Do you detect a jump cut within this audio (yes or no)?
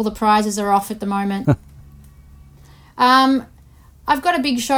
yes